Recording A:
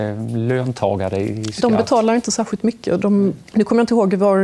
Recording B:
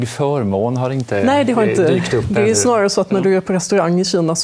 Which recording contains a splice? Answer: A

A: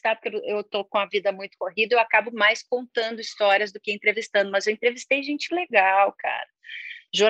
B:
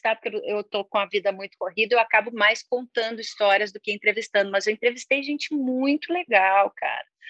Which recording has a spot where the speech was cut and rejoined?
A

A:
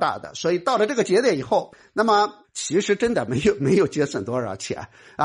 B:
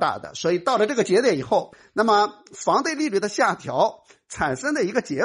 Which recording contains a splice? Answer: A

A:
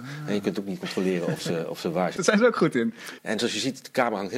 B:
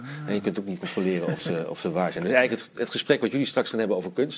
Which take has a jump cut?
A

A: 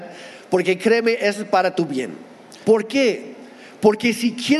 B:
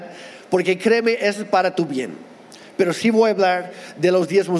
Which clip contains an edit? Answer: A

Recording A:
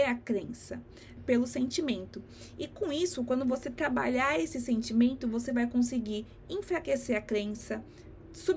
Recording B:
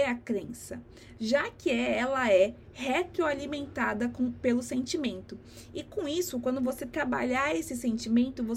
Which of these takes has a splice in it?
A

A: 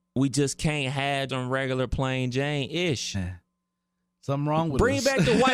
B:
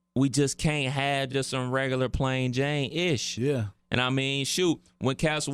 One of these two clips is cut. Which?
A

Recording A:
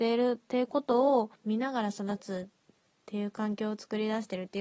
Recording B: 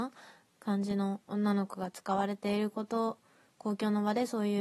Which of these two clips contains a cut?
A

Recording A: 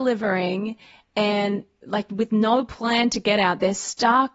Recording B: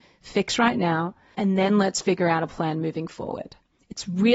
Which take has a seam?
B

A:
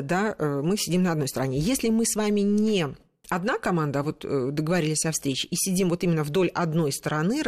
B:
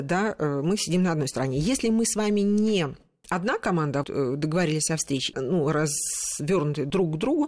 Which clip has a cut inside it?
B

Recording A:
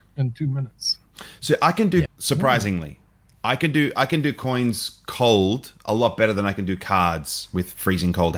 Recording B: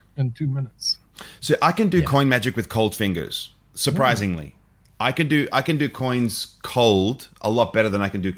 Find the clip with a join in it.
A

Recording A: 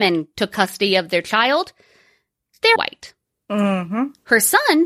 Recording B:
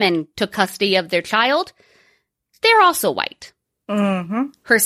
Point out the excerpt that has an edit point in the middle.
A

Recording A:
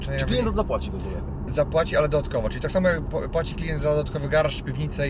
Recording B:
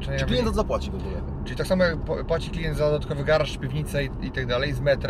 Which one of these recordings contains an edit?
B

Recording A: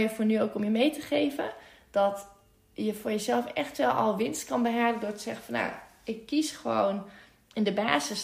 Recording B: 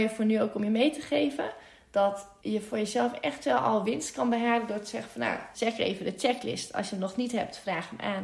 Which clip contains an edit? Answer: B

